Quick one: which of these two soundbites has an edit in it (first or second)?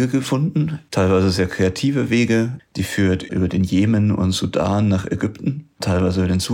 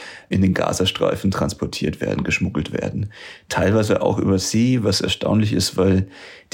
first